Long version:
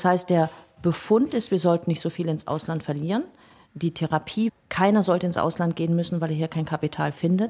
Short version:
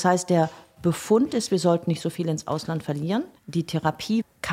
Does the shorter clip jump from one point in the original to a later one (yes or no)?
yes